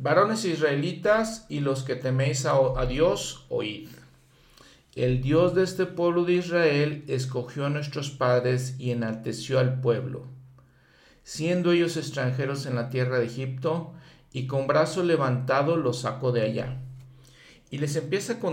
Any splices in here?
no; 0 cuts

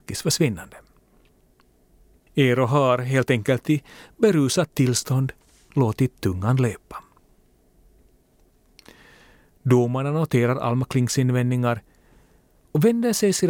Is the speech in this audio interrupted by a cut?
yes; 1 cut; at 2.2 s

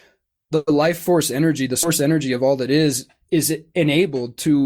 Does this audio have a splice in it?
no; 0 cuts

